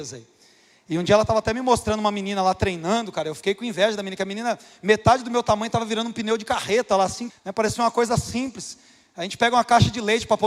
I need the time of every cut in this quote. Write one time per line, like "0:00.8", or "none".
0:07.3

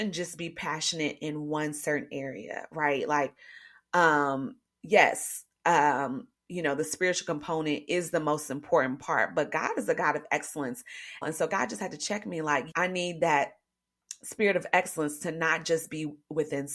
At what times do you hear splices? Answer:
0:11.2
0:12.7

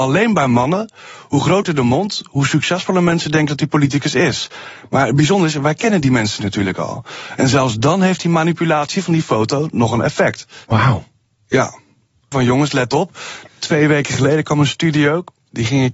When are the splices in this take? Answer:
0:10.6
0:12.3
0:13.5

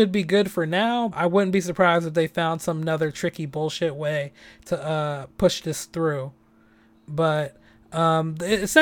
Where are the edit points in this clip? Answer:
0:01.1

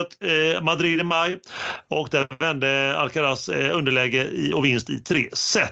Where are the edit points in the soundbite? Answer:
none

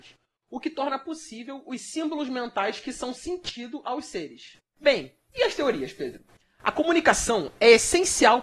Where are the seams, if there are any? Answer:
none

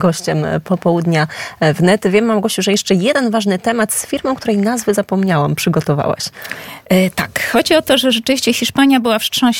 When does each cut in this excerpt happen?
none

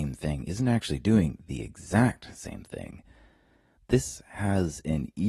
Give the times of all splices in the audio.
0:03.8

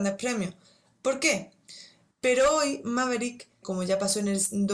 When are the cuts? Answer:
0:02.1
0:03.6

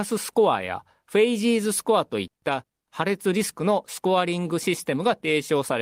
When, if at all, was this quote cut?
none

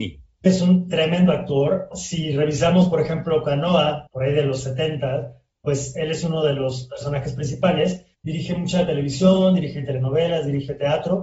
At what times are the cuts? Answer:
0:04.1
0:08.1

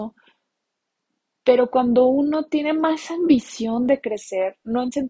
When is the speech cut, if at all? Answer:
none

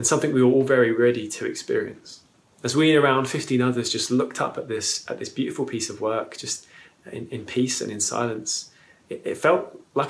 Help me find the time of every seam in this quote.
0:02.5

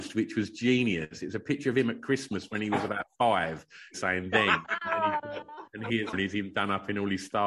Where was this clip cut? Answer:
0:03.9
0:06.1

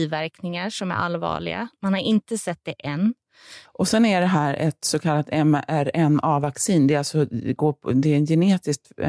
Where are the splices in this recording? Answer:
0:03.6

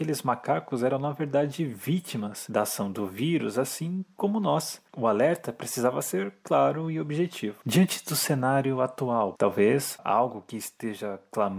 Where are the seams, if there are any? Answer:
0:07.6
0:09.4

